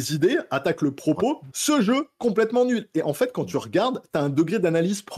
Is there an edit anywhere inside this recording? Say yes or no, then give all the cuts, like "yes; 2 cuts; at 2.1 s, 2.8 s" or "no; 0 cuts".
yes; 1 cut; at 1.5 s